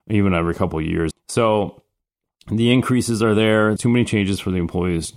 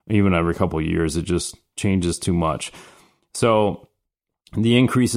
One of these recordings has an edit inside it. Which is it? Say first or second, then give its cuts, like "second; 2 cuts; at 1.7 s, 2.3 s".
first; 2 cuts; at 1.1 s, 3.8 s